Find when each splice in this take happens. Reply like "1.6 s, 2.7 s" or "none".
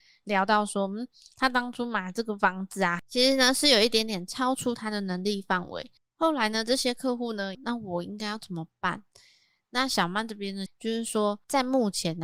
6.0 s, 7.5 s, 10.7 s